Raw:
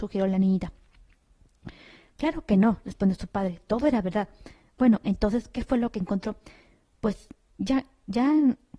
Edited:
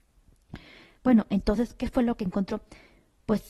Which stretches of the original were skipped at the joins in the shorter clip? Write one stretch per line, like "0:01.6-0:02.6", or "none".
0:02.1-0:04.7